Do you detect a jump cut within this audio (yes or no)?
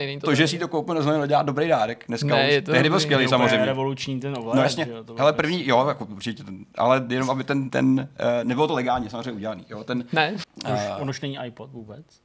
yes